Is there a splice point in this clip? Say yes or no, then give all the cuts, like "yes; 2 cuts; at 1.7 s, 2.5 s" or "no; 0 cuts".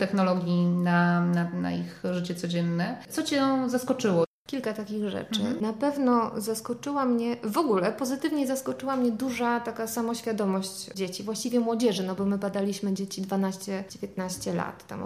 no; 0 cuts